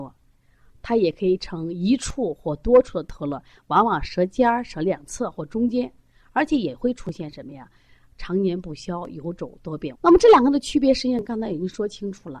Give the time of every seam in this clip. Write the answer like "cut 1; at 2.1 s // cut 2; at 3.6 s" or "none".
cut 1; at 9.9 s